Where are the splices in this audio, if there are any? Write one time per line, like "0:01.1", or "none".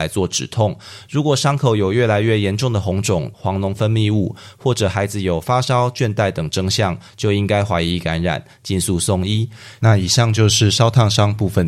0:01.1
0:03.3